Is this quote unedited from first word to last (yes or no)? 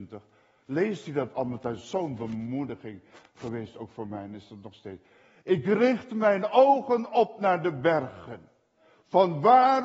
yes